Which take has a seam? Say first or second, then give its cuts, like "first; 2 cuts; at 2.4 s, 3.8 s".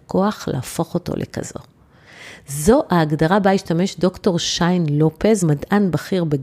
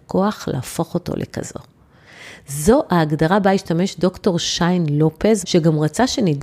second; 1 cut; at 5.4 s